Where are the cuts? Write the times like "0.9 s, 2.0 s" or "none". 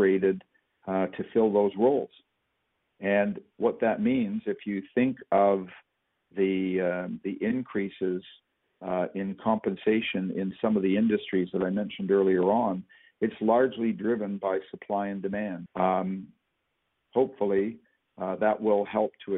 15.7 s